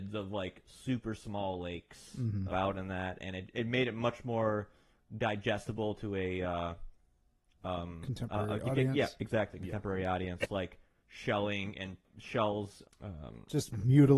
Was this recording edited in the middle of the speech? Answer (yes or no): yes